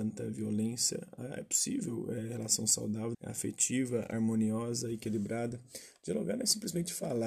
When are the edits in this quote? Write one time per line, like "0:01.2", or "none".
0:03.1